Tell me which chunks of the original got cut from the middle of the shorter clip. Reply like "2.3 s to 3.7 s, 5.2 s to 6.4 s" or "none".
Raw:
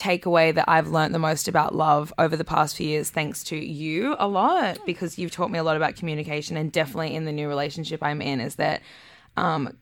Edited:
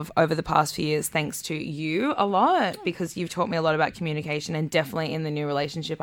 none